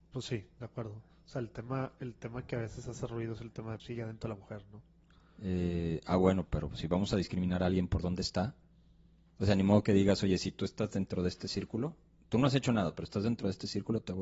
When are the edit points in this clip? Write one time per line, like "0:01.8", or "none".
0:03.8

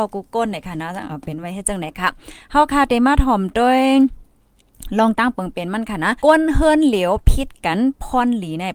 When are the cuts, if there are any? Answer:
0:01.1
0:06.2

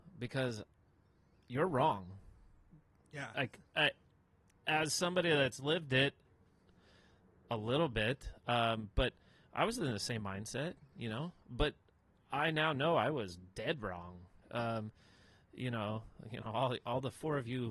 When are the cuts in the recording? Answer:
0:14.4

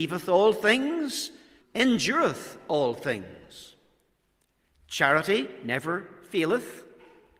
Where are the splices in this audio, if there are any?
0:01.6

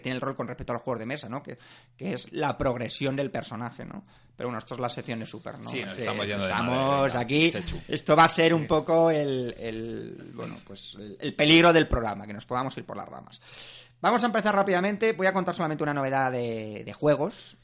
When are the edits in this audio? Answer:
none

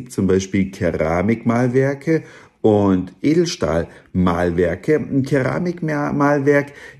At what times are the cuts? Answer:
none

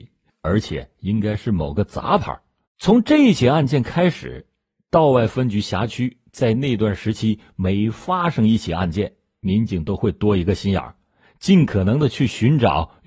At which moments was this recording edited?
0:02.7

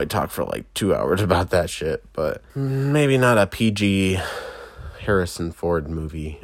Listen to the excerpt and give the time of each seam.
0:02.5

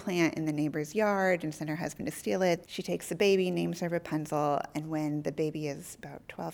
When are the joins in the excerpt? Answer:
0:02.6

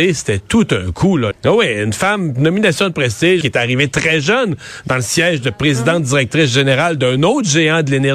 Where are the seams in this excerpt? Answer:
0:01.3
0:03.4

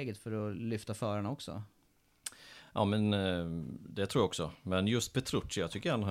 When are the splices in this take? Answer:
none

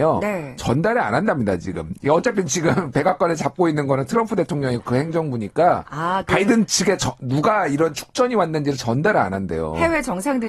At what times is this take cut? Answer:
none

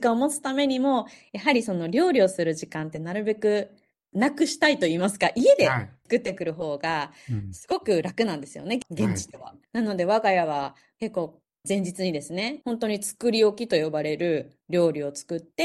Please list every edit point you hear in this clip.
0:09.6
0:12.6

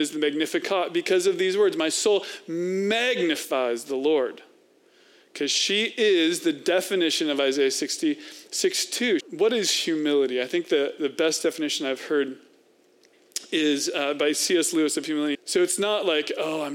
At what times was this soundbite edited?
0:09.2
0:15.3

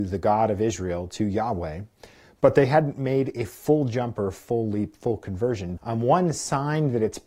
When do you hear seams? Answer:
0:05.8

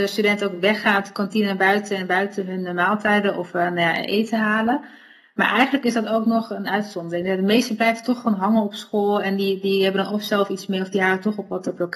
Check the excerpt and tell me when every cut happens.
none

